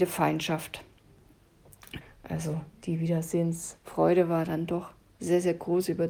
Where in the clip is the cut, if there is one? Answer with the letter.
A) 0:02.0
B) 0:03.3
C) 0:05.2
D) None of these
A